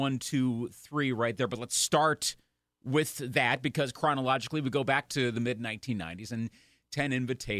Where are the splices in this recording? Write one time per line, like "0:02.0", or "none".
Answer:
none